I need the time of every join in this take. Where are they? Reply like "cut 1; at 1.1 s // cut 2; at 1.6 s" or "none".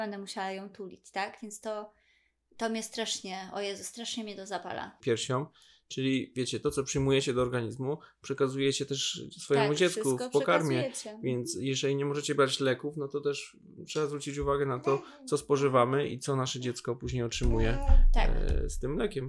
cut 1; at 5.0 s